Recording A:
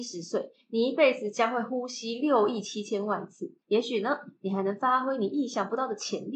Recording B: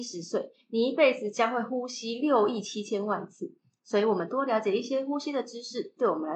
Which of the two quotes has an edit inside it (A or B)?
A